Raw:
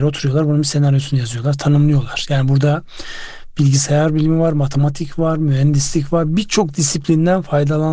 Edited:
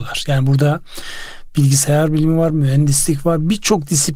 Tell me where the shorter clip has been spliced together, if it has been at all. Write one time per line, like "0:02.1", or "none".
0:02.5

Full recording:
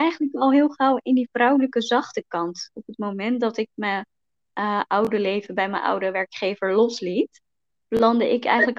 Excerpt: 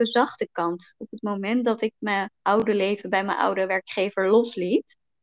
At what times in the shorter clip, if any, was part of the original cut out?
0:02.4

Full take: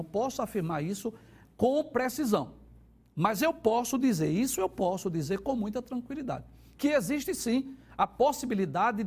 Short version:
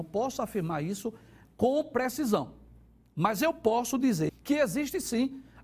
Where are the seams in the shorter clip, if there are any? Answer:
0:04.3

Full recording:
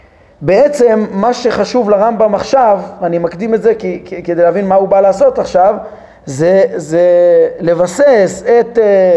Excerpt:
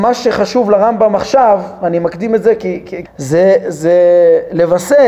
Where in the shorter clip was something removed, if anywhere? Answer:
0:03.0

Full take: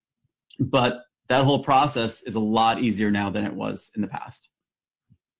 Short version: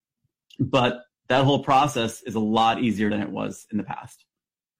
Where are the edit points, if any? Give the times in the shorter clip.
0:03.1

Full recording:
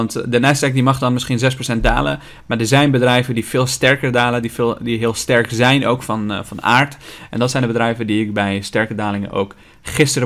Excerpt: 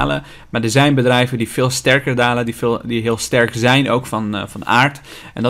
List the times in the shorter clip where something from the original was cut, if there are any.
none

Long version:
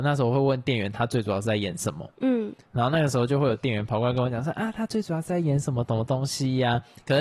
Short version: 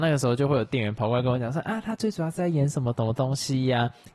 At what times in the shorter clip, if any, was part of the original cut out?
none

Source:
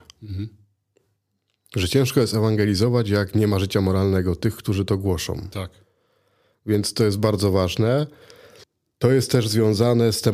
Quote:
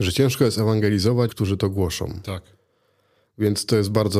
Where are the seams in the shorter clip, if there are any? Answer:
0:01.3

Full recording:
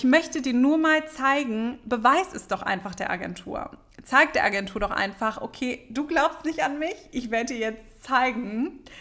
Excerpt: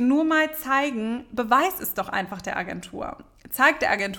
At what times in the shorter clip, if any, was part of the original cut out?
none

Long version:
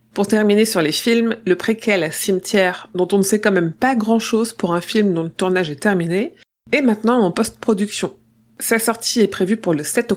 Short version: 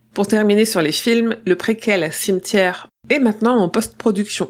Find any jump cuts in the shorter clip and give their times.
0:02.9

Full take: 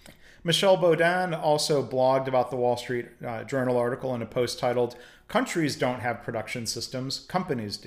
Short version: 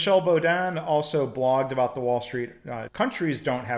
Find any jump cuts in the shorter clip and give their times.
0:02.9

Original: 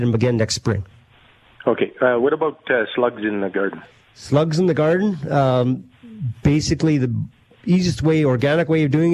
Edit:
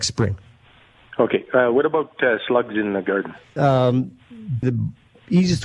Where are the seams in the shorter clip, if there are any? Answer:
0:03.6
0:04.6

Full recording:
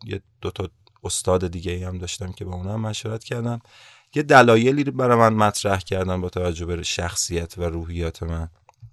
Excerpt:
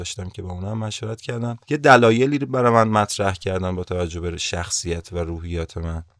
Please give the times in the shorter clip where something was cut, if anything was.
0:01.6

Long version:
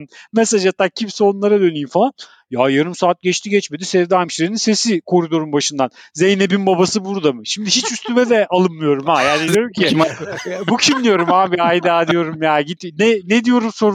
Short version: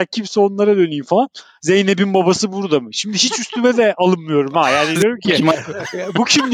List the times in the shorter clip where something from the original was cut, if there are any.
0:01.6

